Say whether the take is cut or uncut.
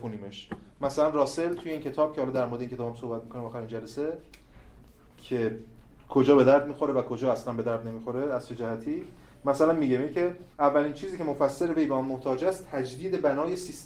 cut